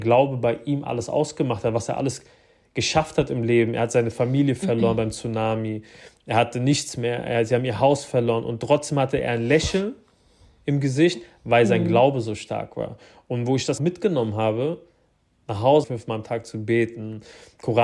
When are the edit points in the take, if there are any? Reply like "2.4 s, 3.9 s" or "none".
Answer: 13.8 s, 15.8 s